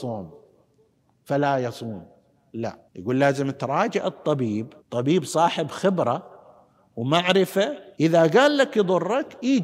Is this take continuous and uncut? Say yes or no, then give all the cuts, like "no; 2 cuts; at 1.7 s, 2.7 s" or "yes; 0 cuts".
no; 3 cuts; at 2.9 s, 4.8 s, 7.9 s